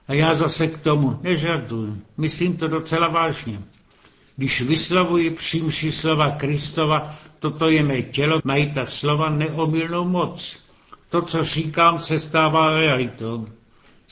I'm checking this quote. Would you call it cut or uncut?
cut